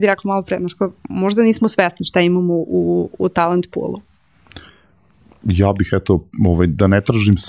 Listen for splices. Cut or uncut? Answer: uncut